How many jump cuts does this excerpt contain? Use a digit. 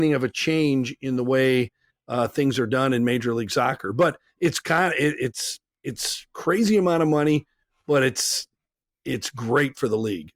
0